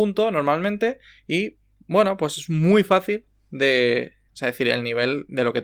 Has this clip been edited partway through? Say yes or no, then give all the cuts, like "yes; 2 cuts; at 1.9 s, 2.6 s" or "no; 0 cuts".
yes; 1 cut; at 4.3 s